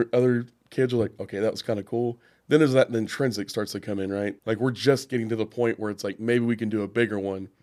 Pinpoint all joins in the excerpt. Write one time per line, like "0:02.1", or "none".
0:04.4